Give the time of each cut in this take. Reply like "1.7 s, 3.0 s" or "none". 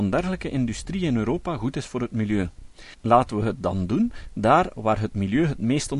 2.9 s